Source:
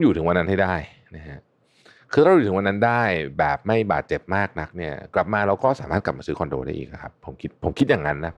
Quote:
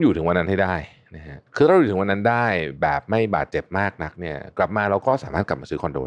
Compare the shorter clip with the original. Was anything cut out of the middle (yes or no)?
yes